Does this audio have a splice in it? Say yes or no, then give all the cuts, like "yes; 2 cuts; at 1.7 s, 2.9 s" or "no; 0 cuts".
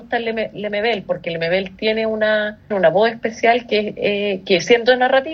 yes; 1 cut; at 2.7 s